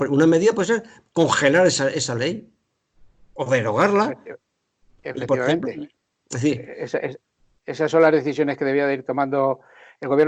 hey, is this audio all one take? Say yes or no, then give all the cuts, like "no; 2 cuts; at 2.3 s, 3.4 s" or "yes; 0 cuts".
yes; 0 cuts